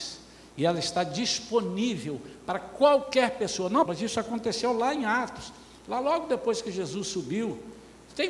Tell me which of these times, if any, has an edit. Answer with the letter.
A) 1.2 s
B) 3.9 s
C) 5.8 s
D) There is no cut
B